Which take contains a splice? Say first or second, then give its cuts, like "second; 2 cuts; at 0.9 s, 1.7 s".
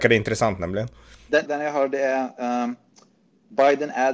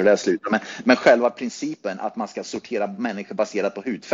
first; 1 cut; at 1.5 s